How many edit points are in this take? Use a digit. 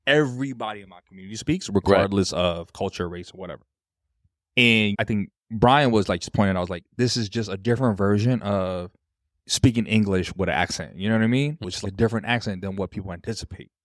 0